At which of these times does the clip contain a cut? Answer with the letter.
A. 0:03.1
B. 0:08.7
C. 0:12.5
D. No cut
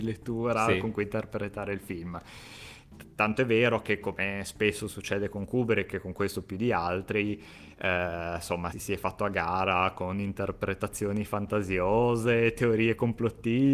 B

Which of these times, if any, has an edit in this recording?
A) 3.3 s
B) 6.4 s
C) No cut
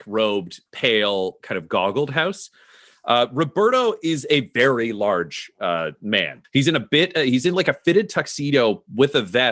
B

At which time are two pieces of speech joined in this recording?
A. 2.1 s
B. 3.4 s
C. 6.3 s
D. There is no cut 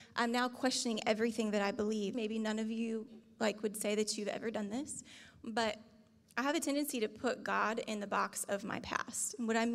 A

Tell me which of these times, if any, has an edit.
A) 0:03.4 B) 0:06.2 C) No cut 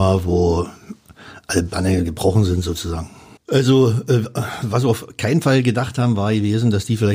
A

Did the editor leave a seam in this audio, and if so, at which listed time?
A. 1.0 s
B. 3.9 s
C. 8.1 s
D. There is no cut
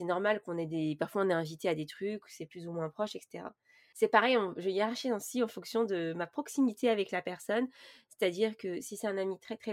B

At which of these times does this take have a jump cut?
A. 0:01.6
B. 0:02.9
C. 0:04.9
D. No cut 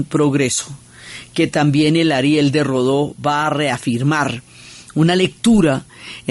D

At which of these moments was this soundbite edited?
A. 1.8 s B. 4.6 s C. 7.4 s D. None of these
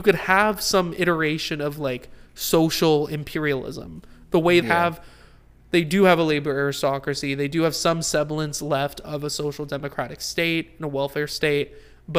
B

